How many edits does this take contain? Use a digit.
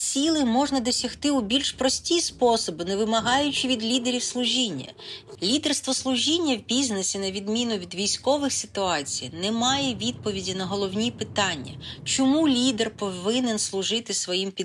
1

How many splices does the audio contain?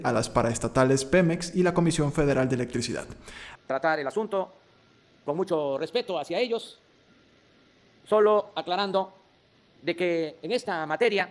1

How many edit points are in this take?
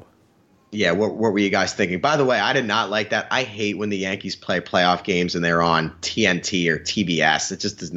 0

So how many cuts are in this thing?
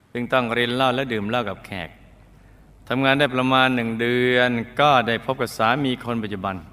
0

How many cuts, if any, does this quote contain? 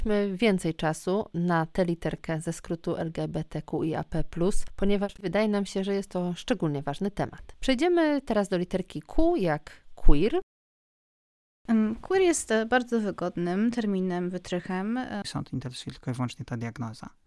1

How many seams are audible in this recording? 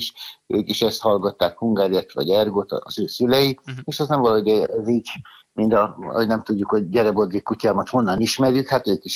0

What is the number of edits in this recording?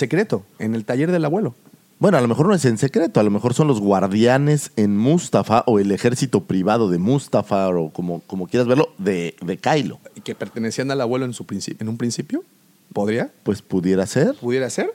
0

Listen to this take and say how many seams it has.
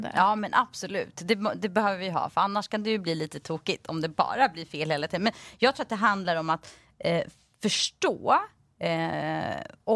0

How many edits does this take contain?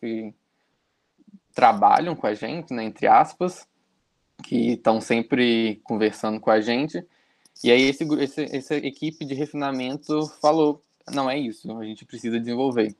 0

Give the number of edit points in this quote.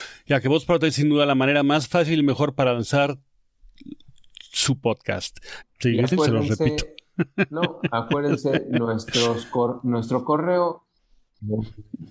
1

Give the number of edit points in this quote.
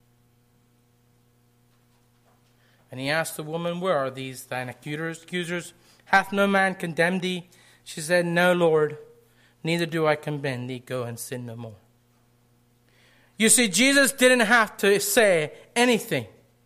0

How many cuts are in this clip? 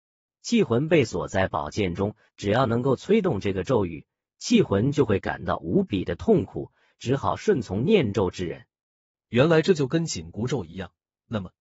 1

